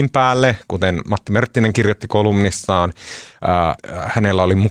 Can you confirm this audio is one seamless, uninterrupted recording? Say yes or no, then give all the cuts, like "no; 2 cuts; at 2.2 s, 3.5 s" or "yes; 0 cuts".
no; 1 cut; at 3.8 s